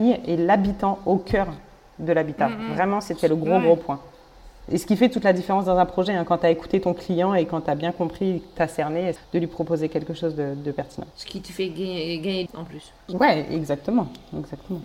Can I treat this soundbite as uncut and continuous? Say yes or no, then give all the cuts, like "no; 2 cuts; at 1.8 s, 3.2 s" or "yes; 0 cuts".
no; 3 cuts; at 9.2 s, 11.1 s, 12.5 s